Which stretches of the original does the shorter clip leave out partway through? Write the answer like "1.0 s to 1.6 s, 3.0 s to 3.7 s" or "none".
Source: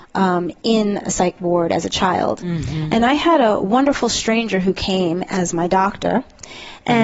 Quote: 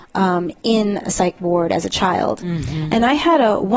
none